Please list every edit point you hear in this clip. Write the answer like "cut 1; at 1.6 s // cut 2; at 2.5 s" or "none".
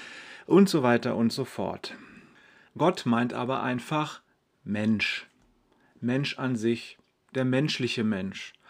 none